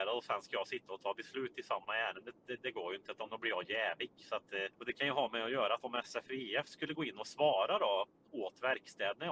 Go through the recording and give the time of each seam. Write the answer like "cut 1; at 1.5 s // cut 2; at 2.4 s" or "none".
cut 1; at 4.7 s